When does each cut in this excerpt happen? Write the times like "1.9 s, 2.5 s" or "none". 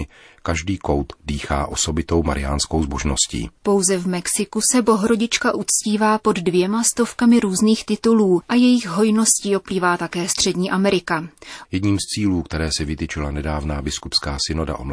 3.6 s, 11.6 s